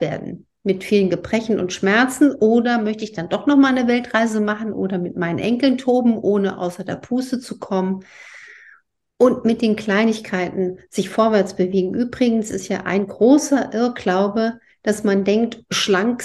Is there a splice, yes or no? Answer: no